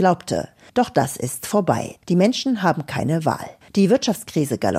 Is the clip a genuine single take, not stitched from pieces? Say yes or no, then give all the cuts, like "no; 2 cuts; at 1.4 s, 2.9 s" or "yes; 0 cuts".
yes; 0 cuts